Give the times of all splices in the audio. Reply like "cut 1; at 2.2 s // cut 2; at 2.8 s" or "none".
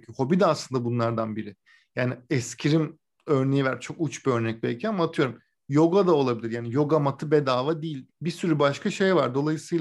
cut 1; at 8.1 s